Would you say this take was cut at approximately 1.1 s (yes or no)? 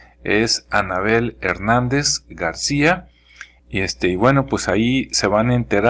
no